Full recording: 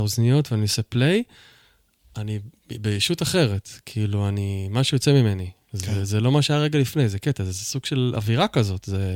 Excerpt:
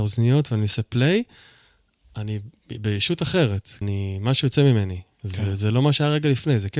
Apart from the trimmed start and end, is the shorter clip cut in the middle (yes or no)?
yes